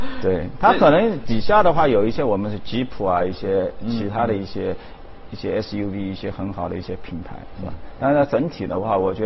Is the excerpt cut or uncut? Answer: uncut